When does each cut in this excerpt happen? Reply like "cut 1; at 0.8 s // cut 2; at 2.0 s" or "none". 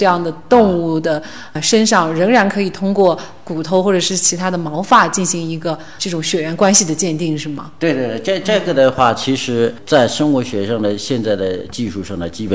none